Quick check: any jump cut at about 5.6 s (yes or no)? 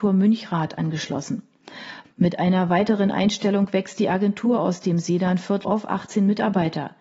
yes